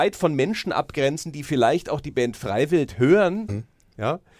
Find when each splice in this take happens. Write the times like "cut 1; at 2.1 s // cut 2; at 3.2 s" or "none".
cut 1; at 3.5 s